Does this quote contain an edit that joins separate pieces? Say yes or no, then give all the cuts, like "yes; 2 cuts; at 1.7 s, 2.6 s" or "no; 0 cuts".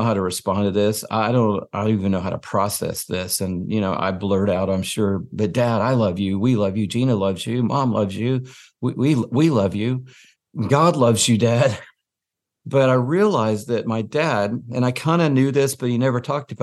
no; 0 cuts